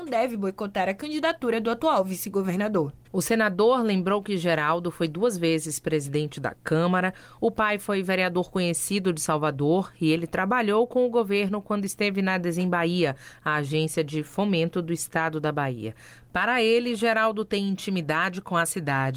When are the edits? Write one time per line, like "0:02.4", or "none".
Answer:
0:03.0